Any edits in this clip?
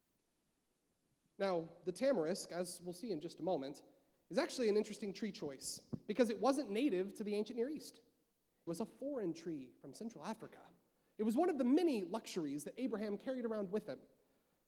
yes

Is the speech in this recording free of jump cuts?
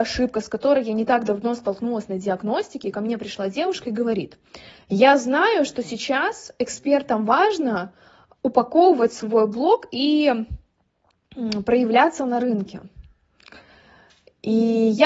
yes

